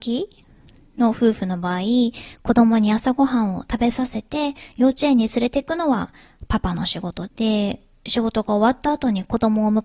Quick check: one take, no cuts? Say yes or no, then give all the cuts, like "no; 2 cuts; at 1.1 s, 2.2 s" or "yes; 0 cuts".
no; 1 cut; at 7.3 s